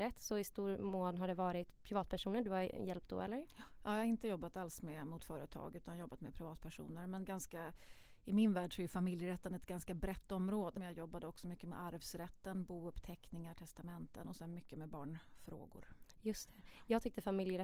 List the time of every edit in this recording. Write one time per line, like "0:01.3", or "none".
0:10.8